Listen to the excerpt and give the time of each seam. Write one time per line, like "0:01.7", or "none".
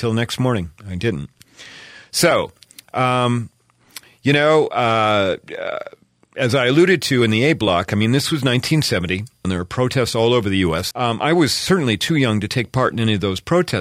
0:09.4
0:10.9